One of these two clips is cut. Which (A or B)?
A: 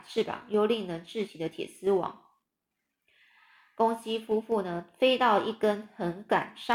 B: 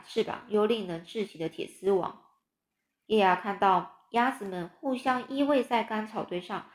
B